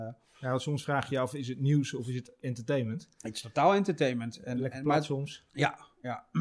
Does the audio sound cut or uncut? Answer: cut